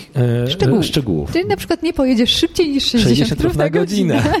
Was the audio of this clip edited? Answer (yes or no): yes